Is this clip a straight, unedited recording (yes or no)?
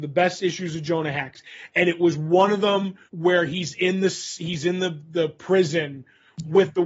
no